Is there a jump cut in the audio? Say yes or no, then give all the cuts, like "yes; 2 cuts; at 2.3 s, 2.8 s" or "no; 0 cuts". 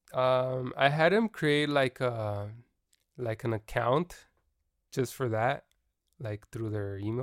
no; 0 cuts